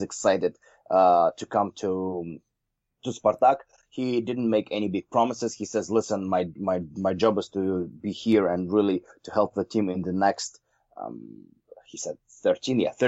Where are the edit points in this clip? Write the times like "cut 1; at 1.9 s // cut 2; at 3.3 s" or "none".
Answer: none